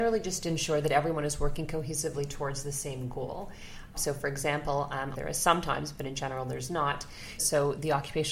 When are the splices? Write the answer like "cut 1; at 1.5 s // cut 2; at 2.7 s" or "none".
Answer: cut 1; at 3.9 s // cut 2; at 5.1 s // cut 3; at 7.4 s